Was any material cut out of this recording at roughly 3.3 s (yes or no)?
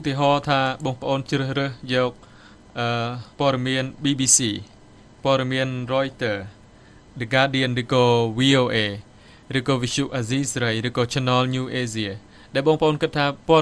yes